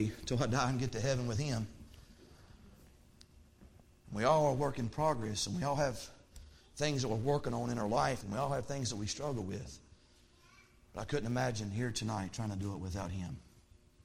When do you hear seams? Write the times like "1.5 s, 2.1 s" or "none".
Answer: 8.2 s